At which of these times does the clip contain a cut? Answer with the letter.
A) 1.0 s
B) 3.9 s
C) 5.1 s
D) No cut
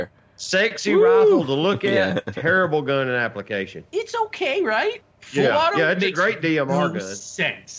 B